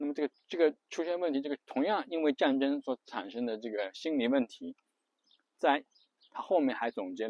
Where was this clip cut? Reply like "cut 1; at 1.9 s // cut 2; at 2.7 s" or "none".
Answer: cut 1; at 6.2 s

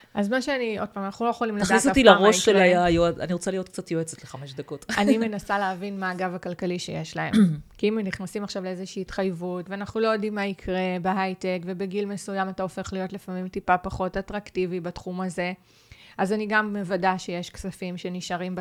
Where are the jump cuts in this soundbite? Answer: cut 1; at 9.7 s

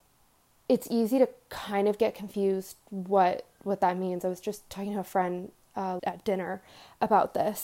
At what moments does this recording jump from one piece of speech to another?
cut 1; at 6.0 s

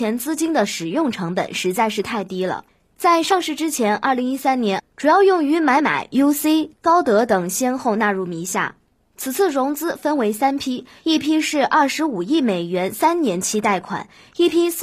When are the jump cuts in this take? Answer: cut 1; at 4.8 s // cut 2; at 5.8 s

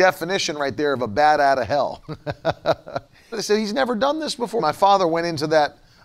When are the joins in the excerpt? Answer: cut 1; at 3.3 s // cut 2; at 4.6 s

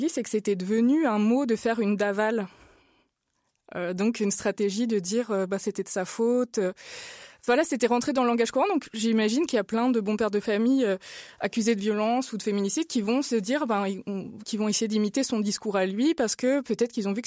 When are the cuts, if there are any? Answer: none

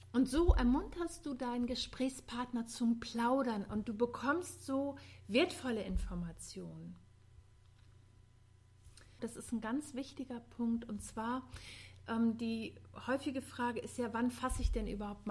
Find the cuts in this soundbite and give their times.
cut 1; at 9.2 s

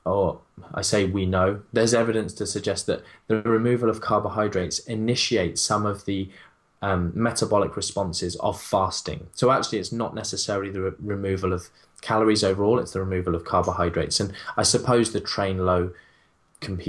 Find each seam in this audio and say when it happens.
none

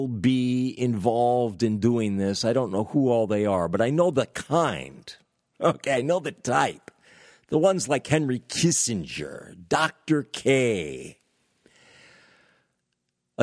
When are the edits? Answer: none

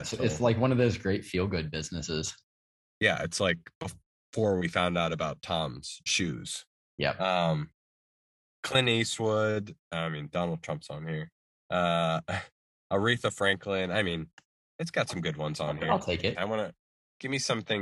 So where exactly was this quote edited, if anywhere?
cut 1; at 16.3 s

